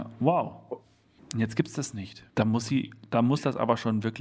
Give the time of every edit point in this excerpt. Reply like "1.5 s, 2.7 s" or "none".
1.2 s, 2.3 s